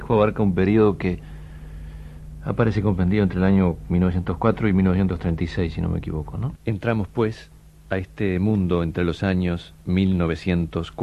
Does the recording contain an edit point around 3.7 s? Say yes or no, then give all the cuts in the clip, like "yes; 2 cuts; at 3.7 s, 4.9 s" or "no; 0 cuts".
no; 2 cuts; at 6.6 s, 9.8 s